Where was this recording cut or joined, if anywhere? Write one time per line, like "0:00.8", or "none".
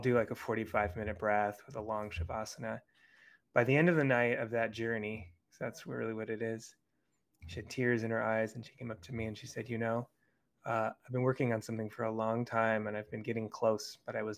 none